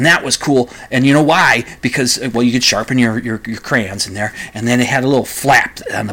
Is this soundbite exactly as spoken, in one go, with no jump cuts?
yes; 0 cuts

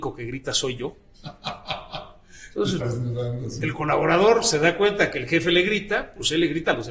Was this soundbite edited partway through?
yes; 1 cut; at 2.8 s

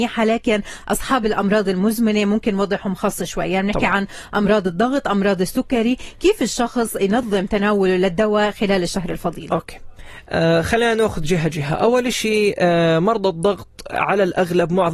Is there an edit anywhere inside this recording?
no; 0 cuts

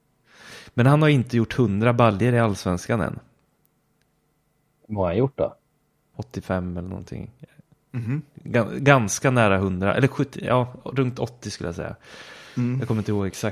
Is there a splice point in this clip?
yes; 1 cut; at 6.1 s

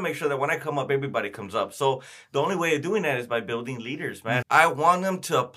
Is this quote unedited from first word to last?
no; 1 cut; at 4.4 s

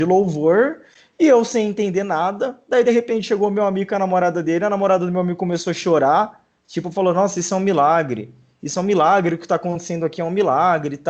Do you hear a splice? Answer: no; 0 cuts

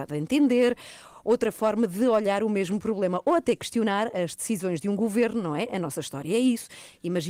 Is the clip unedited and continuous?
yes; 0 cuts

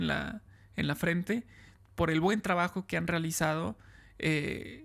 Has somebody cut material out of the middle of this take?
no; 0 cuts

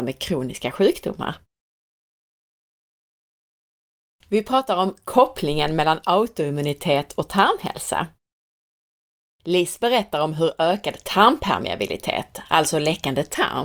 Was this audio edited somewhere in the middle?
no; 0 cuts

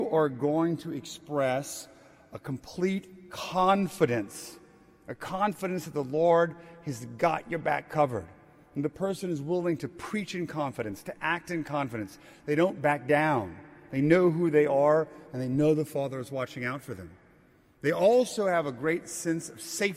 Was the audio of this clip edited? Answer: no; 0 cuts

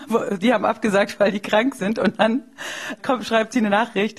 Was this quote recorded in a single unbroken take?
no; 1 cut; at 3.0 s

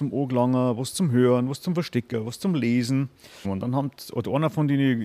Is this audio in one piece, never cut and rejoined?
no; 1 cut; at 3.4 s

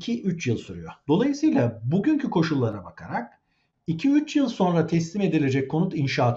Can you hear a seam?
no; 0 cuts

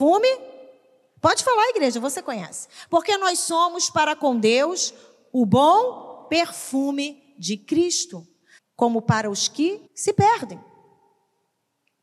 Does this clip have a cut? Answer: yes; 2 cuts; at 8.6 s, 9.9 s

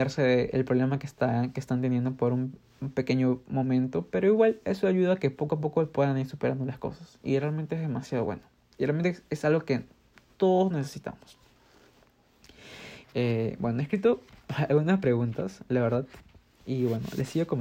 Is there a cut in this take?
yes; 1 cut; at 13.0 s

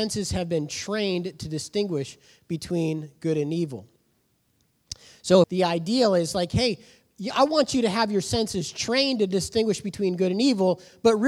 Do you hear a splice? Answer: yes; 1 cut; at 5.4 s

